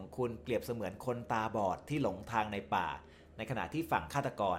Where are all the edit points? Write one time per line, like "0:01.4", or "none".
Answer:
none